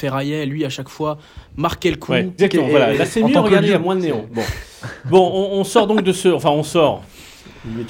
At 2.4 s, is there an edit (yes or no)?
yes